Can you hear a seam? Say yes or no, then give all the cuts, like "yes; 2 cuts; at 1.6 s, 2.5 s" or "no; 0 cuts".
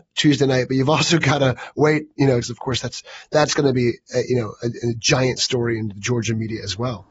yes; 1 cut; at 2.4 s